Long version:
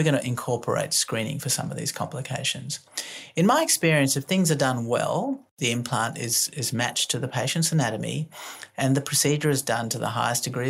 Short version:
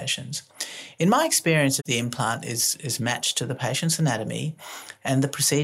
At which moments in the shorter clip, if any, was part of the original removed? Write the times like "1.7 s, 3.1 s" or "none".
1.8 s